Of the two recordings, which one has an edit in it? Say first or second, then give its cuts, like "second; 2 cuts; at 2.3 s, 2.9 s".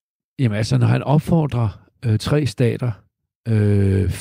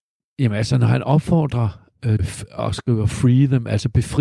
second; 1 cut; at 2.2 s